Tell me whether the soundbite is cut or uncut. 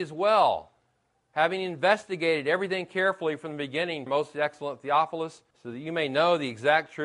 cut